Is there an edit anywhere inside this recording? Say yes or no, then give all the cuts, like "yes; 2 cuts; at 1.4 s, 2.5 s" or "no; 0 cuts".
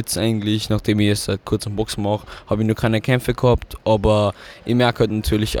no; 0 cuts